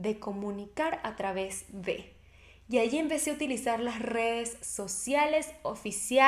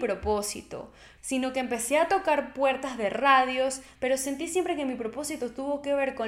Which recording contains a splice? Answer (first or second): second